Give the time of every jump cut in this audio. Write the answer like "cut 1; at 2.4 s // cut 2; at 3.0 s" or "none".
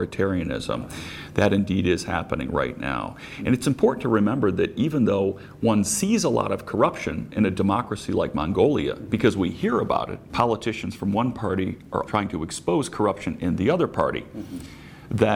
cut 1; at 10.3 s // cut 2; at 12.1 s